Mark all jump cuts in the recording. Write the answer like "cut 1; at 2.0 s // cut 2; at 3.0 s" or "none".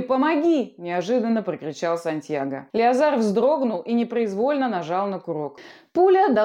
cut 1; at 2.7 s